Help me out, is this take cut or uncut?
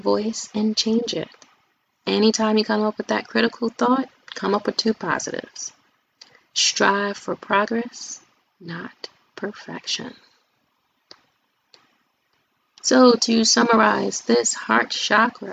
uncut